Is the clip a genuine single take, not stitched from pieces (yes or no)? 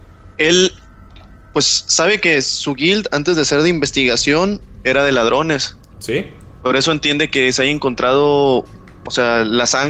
yes